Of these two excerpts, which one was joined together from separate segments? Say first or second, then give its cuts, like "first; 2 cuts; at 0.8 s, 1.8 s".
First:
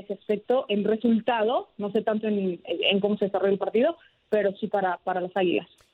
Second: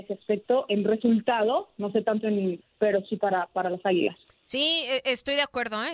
second; 1 cut; at 2.6 s